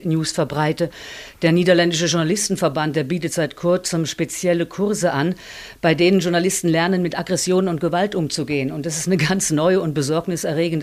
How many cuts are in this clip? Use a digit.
0